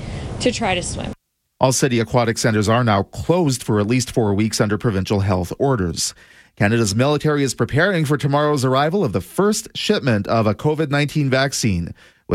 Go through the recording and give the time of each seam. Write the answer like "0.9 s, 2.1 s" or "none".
none

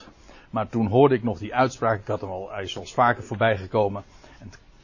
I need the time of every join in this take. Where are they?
none

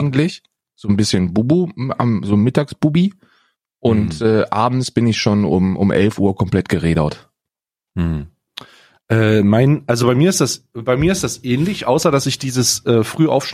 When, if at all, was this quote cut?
none

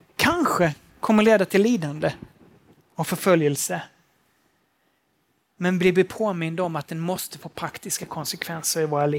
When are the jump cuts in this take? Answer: none

